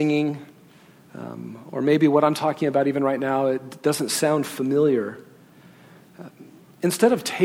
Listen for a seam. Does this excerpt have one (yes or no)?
no